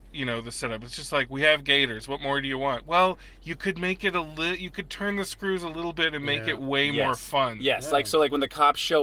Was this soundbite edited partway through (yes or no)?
no